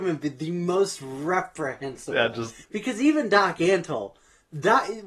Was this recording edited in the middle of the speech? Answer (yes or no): yes